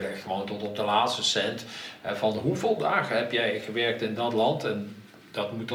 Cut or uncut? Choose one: uncut